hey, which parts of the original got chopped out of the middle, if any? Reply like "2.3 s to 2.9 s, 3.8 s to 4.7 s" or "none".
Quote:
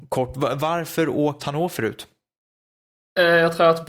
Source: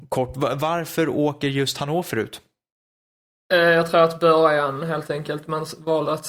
1.4 s to 1.7 s